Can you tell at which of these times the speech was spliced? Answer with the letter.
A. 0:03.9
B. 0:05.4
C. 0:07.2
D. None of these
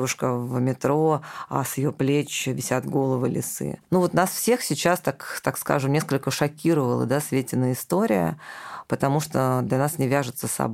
A